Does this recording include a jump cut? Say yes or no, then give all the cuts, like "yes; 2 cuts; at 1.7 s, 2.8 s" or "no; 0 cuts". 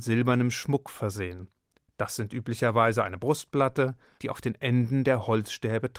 yes; 1 cut; at 4.2 s